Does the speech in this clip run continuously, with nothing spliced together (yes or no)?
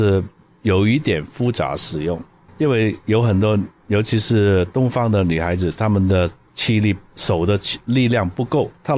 yes